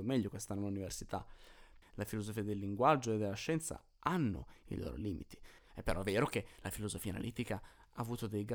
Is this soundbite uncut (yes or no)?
no